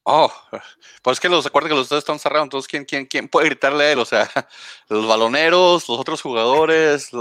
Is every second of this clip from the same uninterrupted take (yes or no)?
yes